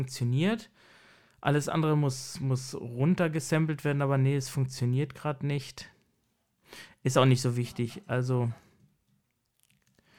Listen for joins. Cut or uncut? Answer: uncut